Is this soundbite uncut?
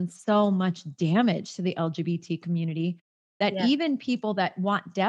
yes; 0 cuts

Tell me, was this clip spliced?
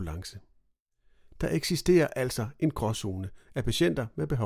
no; 0 cuts

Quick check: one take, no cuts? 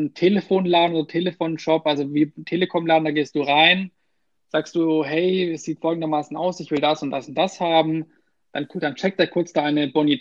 yes; 0 cuts

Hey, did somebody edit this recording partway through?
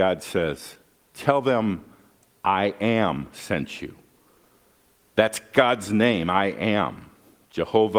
no; 0 cuts

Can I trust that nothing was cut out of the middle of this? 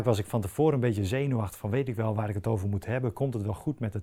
yes; 0 cuts

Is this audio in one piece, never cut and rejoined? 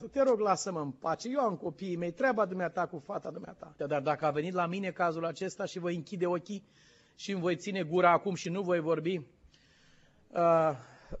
no; 1 cut; at 3.8 s

